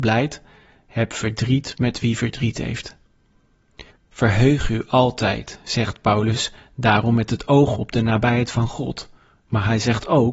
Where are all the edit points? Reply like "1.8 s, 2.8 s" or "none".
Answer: 3.9 s